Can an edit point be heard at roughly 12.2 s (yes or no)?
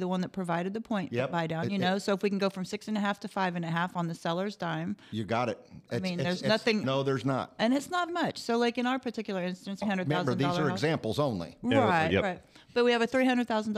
no